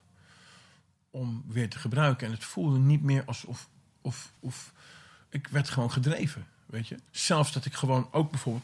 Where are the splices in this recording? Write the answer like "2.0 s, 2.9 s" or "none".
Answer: 4.4 s, 7.1 s